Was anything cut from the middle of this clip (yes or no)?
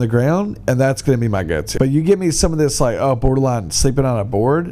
yes